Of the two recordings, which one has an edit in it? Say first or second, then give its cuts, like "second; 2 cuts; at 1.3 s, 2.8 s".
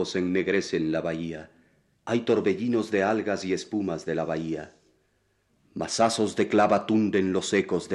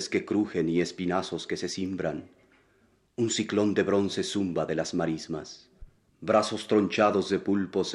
first; 2 cuts; at 1.9 s, 5.6 s